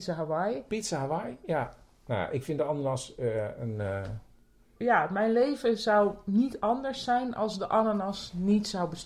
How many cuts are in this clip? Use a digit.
1